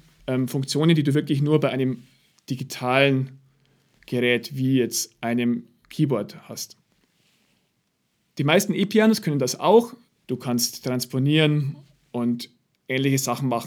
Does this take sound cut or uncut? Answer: cut